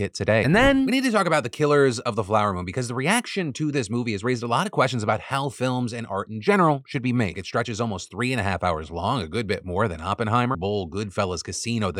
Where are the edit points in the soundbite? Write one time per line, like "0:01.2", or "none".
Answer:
0:07.3
0:10.5